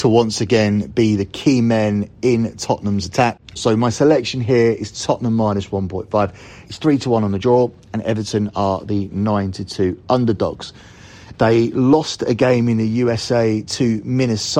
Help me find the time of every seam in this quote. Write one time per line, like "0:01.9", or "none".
0:03.6
0:06.7
0:11.3